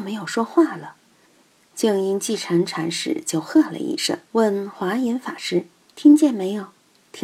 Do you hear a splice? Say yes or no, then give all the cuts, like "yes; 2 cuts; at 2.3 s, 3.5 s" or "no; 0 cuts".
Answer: yes; 2 cuts; at 1.2 s, 4.3 s